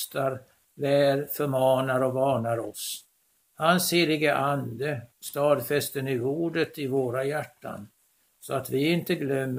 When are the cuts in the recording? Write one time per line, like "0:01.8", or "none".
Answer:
none